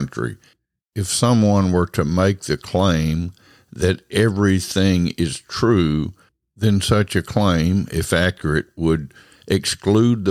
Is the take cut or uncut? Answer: uncut